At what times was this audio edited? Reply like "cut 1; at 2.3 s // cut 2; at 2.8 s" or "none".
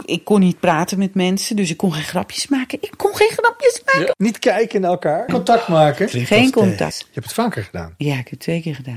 cut 1; at 4.1 s // cut 2; at 5.3 s // cut 3; at 6.9 s